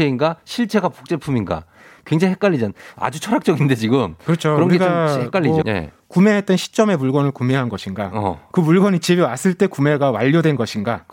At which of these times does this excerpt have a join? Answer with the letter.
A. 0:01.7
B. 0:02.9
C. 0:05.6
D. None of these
C